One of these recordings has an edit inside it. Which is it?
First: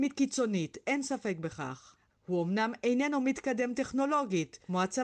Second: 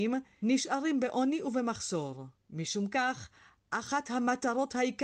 first; 1 cut; at 2.1 s

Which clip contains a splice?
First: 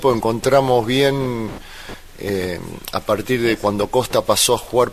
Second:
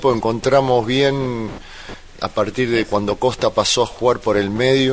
second; 1 cut; at 2.2 s

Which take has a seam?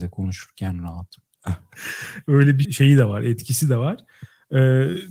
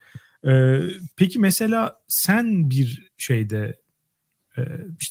first; 2 cuts; at 1.3 s, 2.6 s

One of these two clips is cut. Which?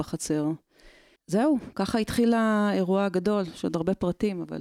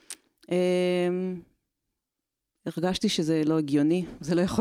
first; 1 cut; at 1.2 s

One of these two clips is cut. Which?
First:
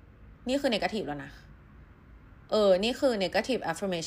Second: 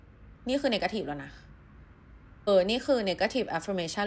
second; 1 cut; at 2.5 s

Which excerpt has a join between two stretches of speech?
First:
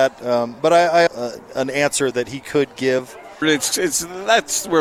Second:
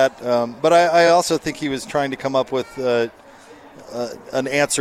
first; 2 cuts; at 1.1 s, 3.4 s

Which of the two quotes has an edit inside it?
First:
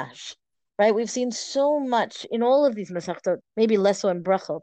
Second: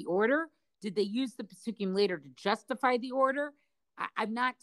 first; 1 cut; at 3.4 s

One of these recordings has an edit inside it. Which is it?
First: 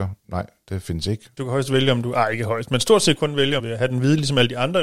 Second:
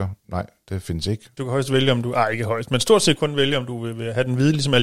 first; 1 cut; at 3.6 s

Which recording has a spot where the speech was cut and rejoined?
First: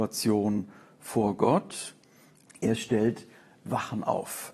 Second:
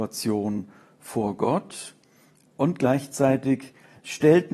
first; 1 cut; at 2.5 s

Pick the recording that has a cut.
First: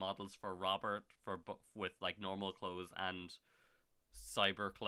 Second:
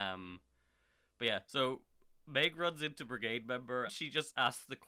second; 2 cuts; at 1.4 s, 3.9 s

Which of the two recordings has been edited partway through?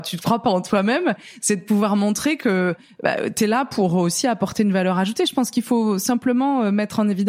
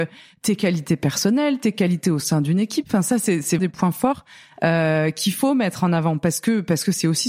second; 1 cut; at 3.6 s

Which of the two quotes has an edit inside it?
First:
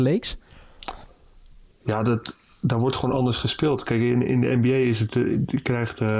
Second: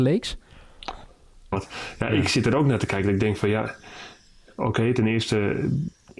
second; 1 cut; at 1.5 s

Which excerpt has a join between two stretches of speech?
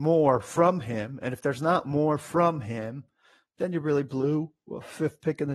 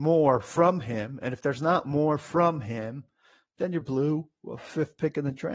second; 1 cut; at 3.8 s

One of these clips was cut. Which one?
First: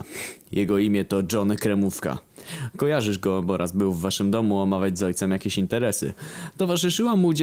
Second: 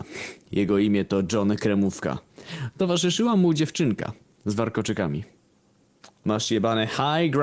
second; 2 cuts; at 2.7 s, 6.2 s

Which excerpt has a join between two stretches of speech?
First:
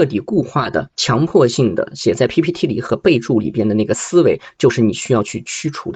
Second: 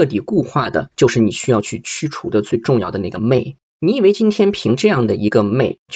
second; 1 cut; at 0.9 s

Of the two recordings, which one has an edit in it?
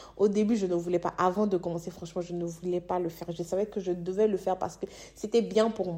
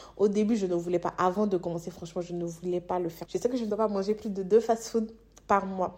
second; 1 cut; at 3.3 s

